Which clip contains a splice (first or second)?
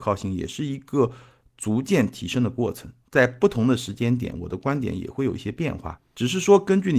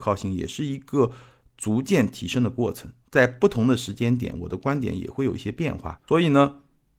second